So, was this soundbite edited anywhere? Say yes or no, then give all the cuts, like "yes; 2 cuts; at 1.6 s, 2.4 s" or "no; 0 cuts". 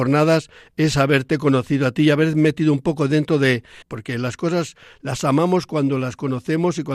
yes; 1 cut; at 3.8 s